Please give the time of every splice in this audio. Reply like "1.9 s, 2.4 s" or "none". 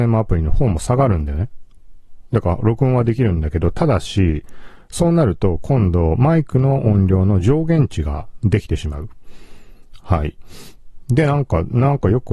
10.0 s